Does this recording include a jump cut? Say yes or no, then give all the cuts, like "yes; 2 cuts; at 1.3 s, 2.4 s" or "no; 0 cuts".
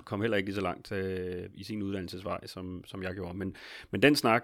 no; 0 cuts